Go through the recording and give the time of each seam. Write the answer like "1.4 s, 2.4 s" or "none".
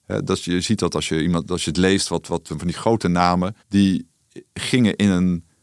2.5 s, 3.6 s